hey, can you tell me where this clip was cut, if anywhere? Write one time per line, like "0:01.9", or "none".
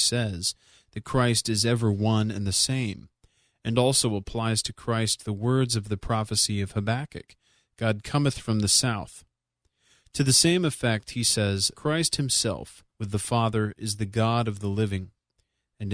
0:11.7
0:12.9